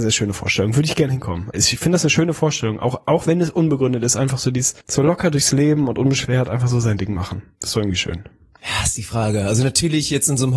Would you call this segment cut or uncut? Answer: cut